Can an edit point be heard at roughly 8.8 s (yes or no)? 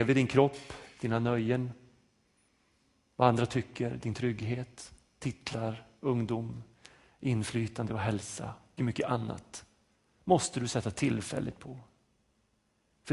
yes